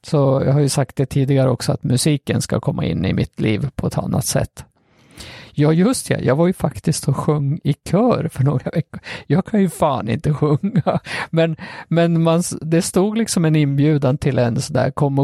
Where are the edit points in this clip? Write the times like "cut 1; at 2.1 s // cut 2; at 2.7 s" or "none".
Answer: none